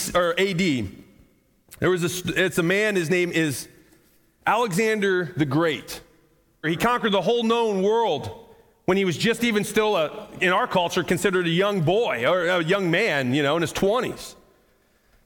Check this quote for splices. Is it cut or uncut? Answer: cut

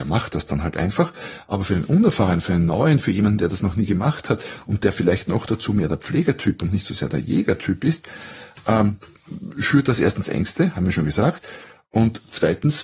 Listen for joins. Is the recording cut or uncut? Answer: uncut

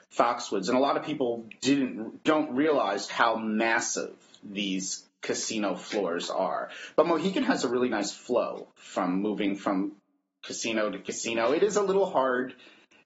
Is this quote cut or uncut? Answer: cut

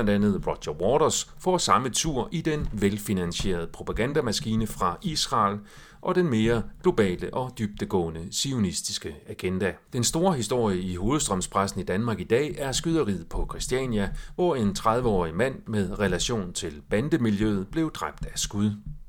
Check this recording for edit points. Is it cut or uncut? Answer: cut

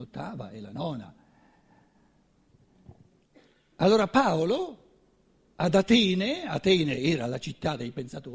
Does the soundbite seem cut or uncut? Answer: uncut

